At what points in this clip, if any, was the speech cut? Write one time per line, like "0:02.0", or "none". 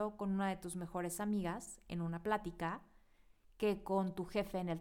none